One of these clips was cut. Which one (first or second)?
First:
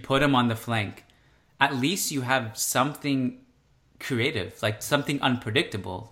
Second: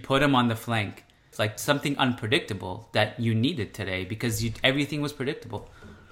second